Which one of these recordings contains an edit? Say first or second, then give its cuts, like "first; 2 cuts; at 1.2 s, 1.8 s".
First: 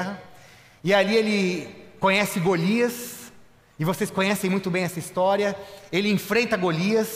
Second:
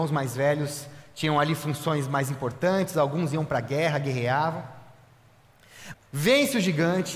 second; 1 cut; at 5.9 s